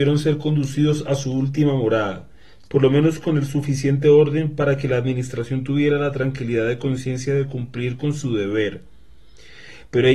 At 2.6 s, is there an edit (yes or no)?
yes